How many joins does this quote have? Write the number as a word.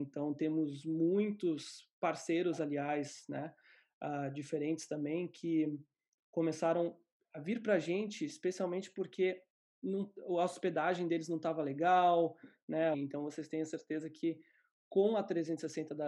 one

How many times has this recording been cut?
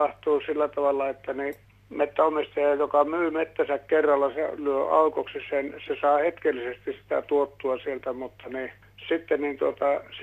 one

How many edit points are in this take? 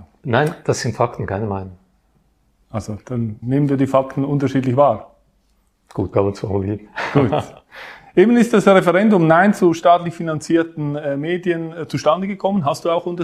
two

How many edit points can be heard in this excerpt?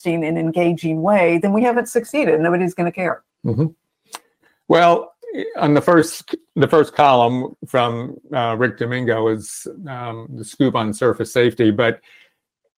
zero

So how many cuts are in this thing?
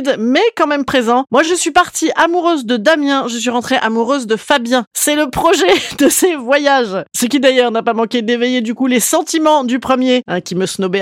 zero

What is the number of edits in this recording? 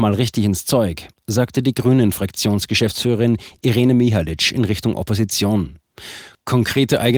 zero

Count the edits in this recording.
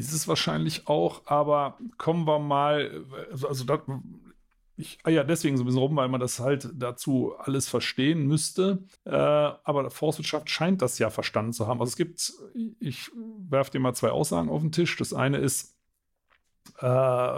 one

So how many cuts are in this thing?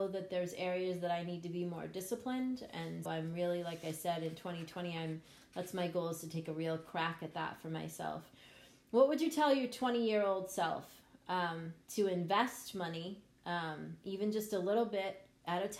two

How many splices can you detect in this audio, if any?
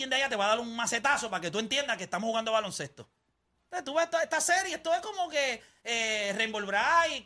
zero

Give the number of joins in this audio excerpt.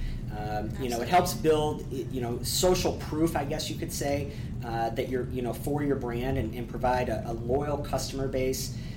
one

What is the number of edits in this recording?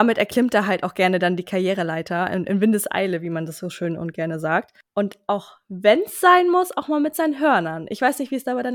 zero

